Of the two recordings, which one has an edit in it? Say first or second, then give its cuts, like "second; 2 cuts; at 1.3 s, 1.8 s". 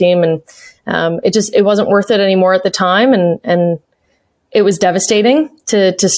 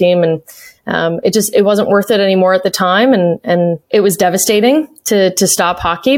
second; 1 cut; at 3.8 s